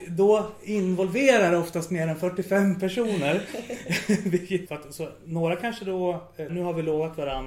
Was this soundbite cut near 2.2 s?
no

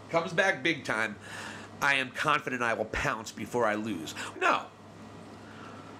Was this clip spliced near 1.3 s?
no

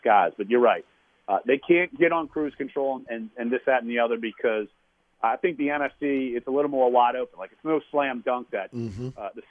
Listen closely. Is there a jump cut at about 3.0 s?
no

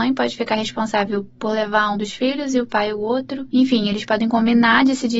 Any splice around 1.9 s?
yes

